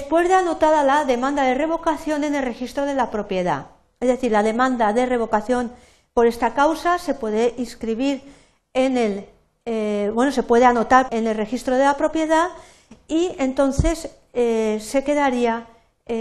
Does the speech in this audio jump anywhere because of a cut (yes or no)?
yes